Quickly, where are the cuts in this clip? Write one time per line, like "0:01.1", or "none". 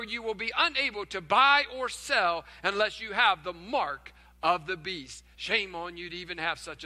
0:05.3